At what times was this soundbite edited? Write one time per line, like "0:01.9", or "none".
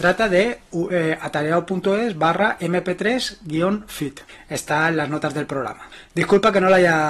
none